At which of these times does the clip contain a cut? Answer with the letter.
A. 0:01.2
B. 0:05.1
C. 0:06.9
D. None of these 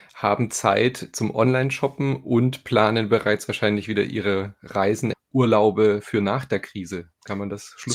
B